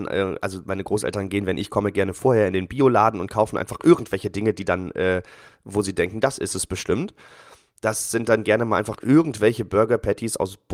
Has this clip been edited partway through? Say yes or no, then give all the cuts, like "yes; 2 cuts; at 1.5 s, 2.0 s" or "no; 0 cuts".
no; 0 cuts